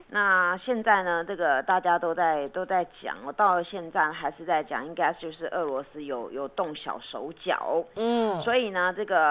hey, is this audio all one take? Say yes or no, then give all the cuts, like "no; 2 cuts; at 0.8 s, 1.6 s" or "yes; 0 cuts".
yes; 0 cuts